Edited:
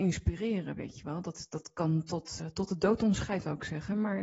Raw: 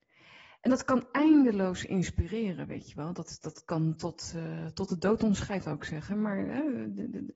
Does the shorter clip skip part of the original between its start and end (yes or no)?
yes